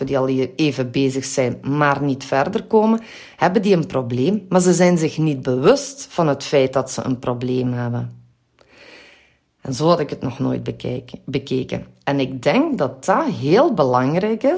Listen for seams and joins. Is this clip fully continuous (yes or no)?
yes